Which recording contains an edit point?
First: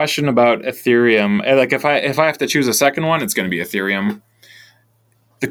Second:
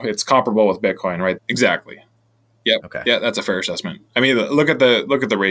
second; 1 cut; at 1.4 s

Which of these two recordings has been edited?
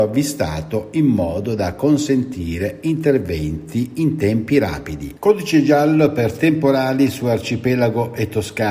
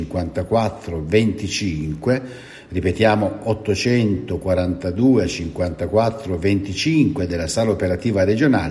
first; 1 cut; at 5.2 s

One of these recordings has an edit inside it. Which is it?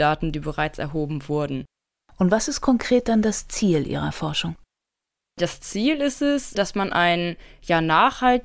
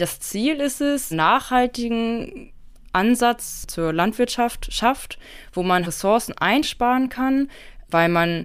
second; 2 cuts; at 1.1 s, 5.8 s

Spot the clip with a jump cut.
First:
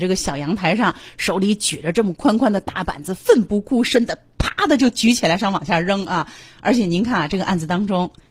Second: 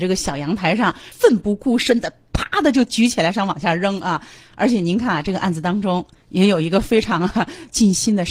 second; 1 cut; at 1.1 s

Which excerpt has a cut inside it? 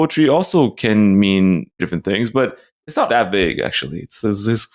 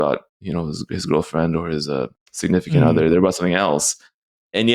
first; 2 cuts; at 1.8 s, 3.1 s

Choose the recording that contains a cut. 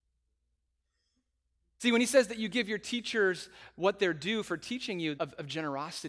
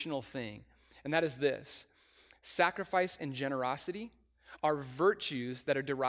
first; 1 cut; at 5.2 s

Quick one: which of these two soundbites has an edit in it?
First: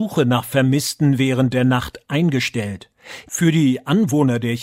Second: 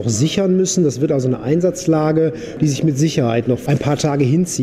first; 1 cut; at 3.3 s

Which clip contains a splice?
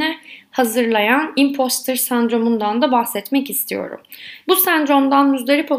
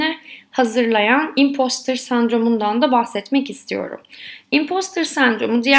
first; 1 cut; at 4.4 s

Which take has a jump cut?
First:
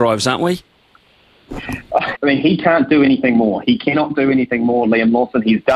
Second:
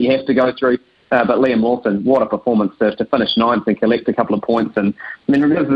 first; 1 cut; at 2.1 s

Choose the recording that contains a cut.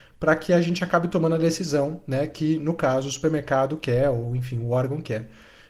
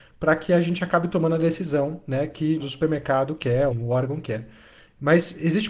second; 2 cuts; at 2.6 s, 3.7 s

